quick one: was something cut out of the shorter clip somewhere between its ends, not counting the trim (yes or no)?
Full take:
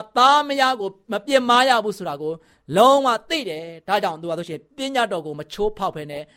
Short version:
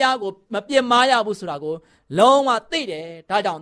no